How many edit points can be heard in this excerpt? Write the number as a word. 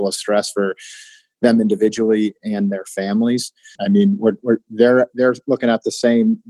two